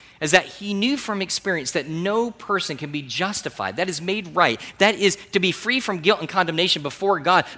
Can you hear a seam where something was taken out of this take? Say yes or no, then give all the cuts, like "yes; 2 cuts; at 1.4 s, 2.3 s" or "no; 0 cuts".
no; 0 cuts